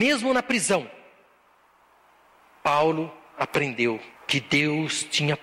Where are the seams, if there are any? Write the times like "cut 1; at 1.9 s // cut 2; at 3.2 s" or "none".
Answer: cut 1; at 4.2 s